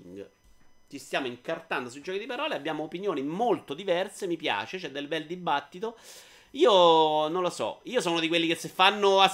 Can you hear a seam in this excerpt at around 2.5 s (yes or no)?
no